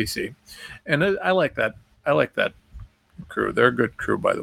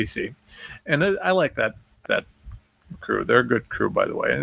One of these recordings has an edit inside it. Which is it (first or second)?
second